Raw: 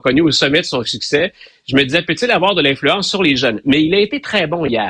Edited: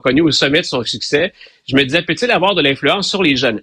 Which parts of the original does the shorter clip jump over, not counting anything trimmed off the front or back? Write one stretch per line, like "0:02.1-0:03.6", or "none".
none